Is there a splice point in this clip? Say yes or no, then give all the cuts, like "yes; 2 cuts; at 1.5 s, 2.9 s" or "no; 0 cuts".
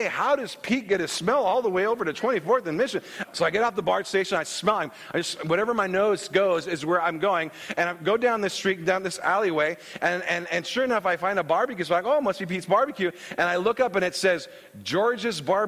yes; 1 cut; at 3.2 s